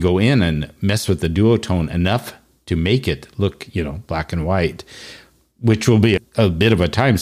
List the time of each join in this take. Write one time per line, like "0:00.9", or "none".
0:06.2

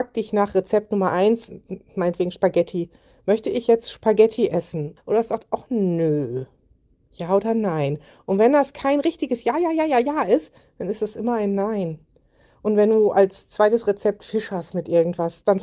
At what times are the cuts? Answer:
0:05.0

